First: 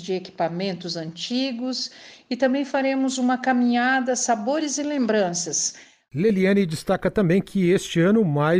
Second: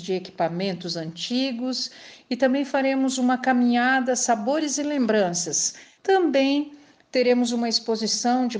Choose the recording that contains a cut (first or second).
second